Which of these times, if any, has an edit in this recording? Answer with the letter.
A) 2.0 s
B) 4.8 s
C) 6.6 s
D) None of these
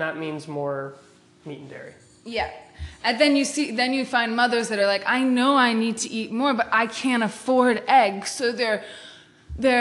D